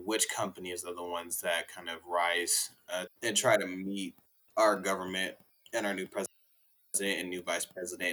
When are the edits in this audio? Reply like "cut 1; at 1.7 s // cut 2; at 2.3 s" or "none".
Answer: cut 1; at 3.1 s